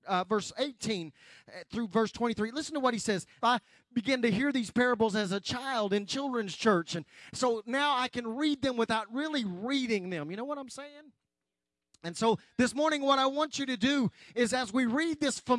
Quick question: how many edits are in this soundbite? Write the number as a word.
one